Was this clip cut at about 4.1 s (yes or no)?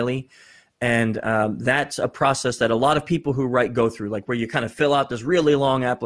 no